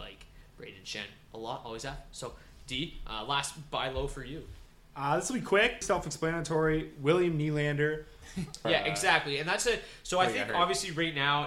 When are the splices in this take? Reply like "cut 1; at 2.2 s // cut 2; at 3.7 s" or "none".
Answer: cut 1; at 5.8 s // cut 2; at 8.6 s

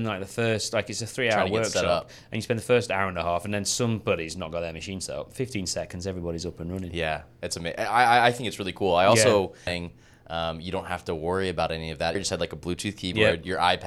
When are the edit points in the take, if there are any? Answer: cut 1; at 9.7 s // cut 2; at 12.2 s

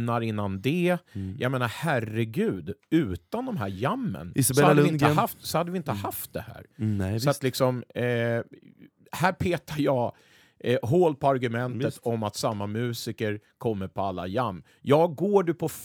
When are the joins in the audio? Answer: none

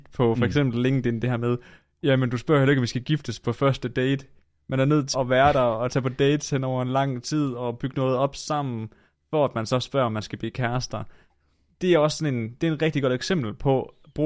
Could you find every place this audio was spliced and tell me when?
cut 1; at 5.1 s

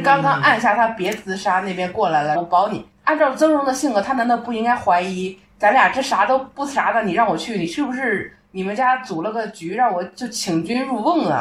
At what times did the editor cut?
cut 1; at 2.3 s

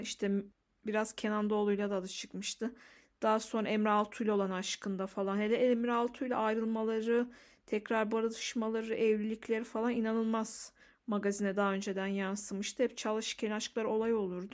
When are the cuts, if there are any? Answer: none

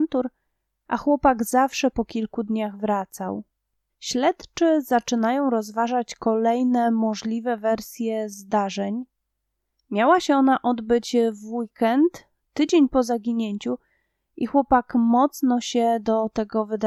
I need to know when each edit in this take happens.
cut 1; at 3.9 s // cut 2; at 9.7 s

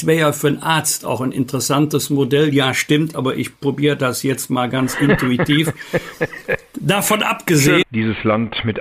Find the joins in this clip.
cut 1; at 3.1 s // cut 2; at 7.8 s

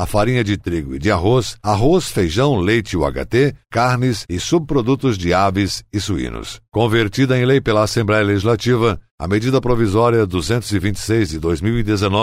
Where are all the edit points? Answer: none

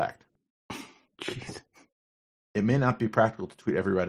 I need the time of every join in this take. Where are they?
none

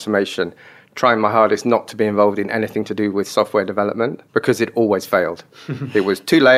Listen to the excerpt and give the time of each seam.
cut 1; at 4.3 s

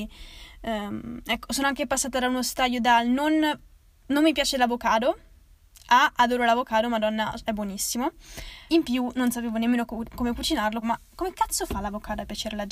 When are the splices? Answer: cut 1; at 8.7 s // cut 2; at 10.8 s

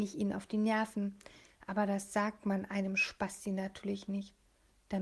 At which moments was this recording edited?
none

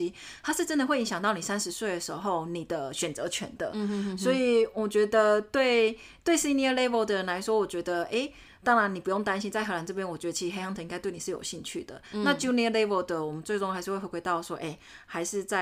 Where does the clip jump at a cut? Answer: none

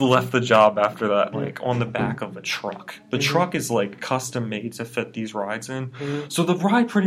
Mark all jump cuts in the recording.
cut 1; at 1.3 s

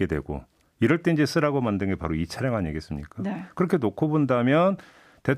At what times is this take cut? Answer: none

